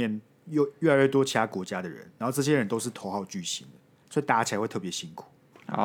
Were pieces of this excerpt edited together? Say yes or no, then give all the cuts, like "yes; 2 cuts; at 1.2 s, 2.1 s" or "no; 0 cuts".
no; 0 cuts